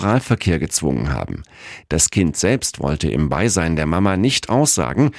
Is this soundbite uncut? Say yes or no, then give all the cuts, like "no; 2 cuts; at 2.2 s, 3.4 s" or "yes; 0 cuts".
no; 1 cut; at 1.8 s